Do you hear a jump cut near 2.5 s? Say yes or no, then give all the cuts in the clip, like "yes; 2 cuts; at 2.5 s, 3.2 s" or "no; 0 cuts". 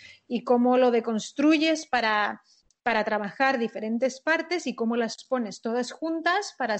no; 0 cuts